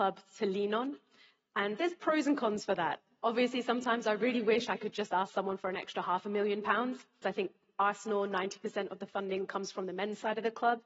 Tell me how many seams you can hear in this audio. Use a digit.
1